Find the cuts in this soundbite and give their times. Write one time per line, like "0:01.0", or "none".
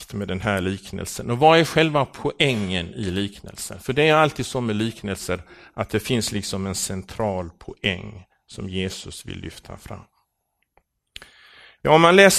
none